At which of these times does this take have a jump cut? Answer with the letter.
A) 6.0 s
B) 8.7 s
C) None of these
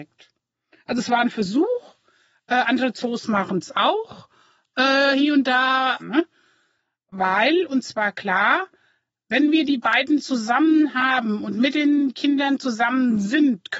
A